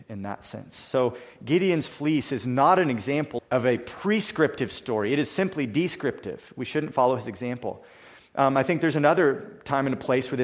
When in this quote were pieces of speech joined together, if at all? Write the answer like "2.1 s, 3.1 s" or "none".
3.4 s